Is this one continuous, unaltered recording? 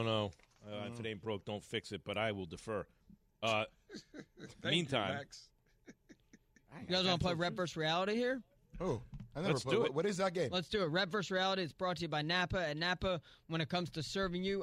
yes; 0 cuts

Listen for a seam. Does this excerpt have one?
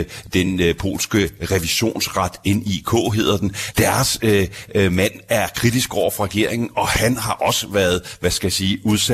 yes; 1 cut; at 3.7 s

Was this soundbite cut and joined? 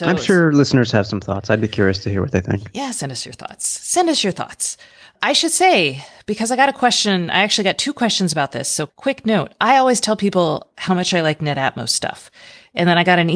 no; 0 cuts

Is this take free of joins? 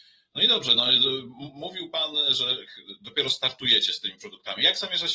yes; 0 cuts

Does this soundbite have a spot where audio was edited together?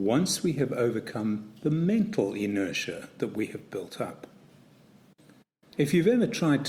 yes; 1 cut; at 5.7 s

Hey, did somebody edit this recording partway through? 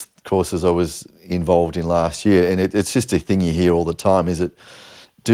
no; 0 cuts

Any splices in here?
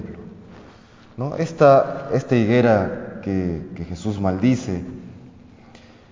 no; 0 cuts

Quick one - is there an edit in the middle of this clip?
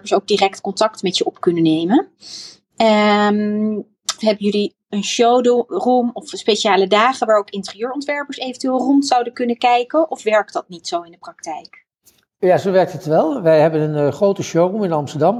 yes; 1 cut; at 4.2 s

